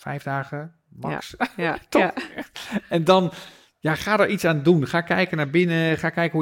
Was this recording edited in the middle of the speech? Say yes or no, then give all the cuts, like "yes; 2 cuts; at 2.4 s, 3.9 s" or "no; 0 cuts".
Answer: no; 0 cuts